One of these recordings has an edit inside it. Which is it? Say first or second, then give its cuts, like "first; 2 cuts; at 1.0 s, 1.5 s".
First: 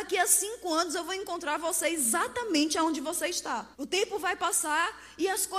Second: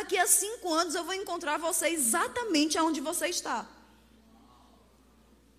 first; 1 cut; at 3.7 s